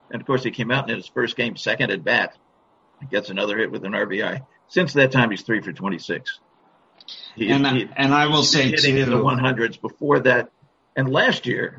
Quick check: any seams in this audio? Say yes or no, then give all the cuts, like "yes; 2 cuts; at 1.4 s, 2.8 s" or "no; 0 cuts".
yes; 1 cut; at 2.8 s